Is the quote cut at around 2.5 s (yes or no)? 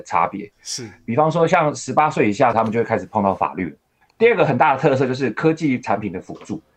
yes